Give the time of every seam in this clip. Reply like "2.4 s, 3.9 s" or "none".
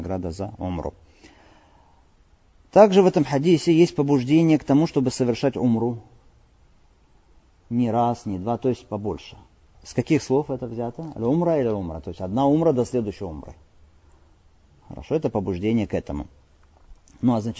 9.7 s